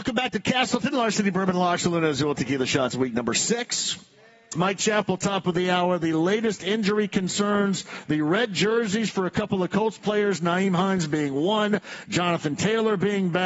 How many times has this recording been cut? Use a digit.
1